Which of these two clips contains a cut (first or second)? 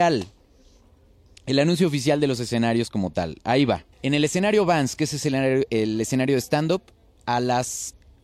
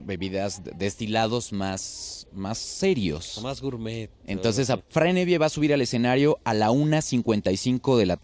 second